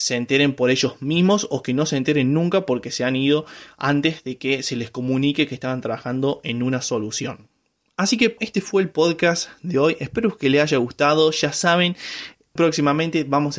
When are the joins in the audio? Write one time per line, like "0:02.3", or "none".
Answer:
0:08.4
0:12.6

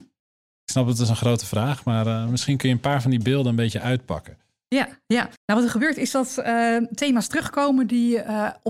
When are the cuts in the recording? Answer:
0:05.4

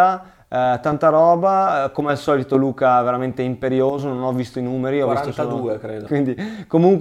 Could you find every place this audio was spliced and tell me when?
0:06.1

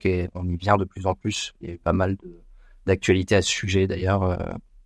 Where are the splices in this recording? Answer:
none

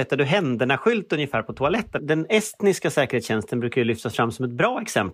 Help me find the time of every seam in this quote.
0:02.0

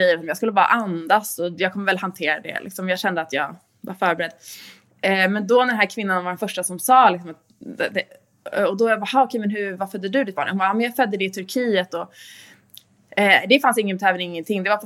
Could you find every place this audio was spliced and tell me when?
none

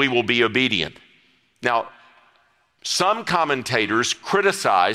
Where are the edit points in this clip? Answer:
none

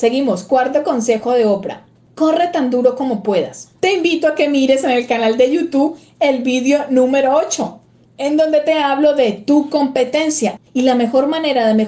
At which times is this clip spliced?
0:03.8
0:10.6

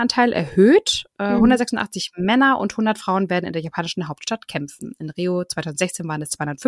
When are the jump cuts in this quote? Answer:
none

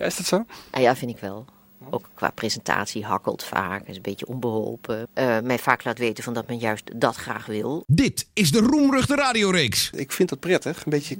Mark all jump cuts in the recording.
0:05.1
0:07.8
0:09.9

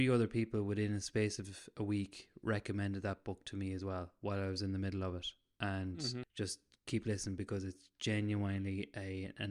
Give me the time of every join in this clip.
0:06.2

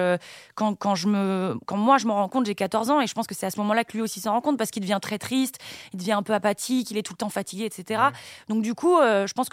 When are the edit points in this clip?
none

